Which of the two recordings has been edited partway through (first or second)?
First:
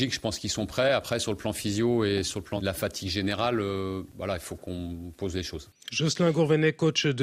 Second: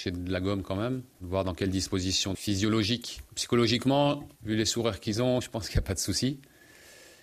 second